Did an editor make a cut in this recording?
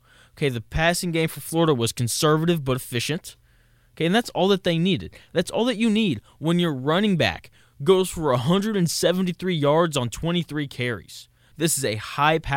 yes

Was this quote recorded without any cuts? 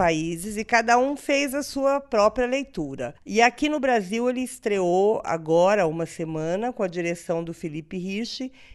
no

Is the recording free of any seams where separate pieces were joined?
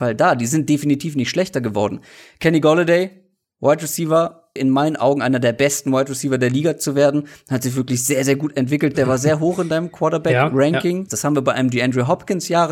no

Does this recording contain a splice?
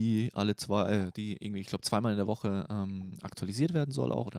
no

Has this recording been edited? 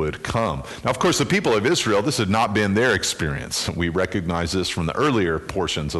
no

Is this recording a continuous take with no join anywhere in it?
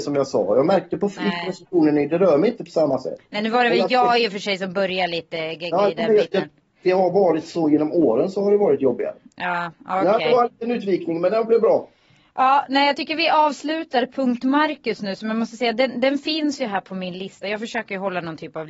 yes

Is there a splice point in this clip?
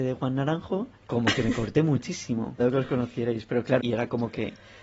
yes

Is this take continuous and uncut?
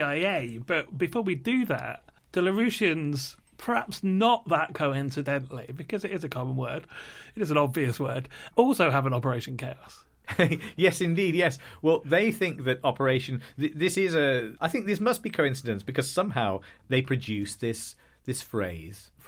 no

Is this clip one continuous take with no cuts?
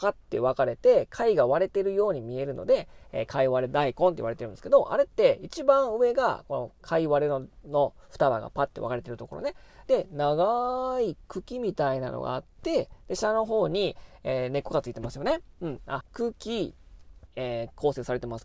no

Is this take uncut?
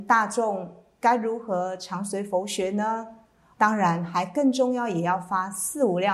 no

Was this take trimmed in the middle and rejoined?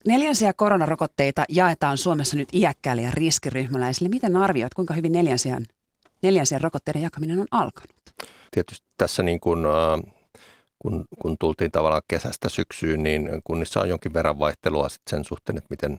yes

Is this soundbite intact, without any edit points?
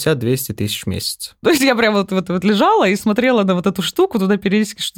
no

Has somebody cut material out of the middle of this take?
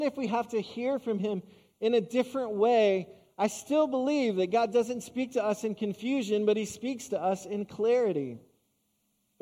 no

